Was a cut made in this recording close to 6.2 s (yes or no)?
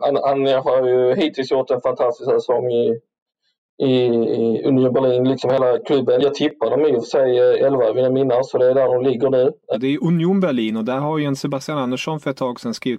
no